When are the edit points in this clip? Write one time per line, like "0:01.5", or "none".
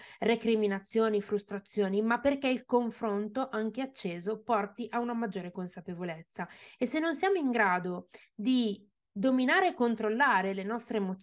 none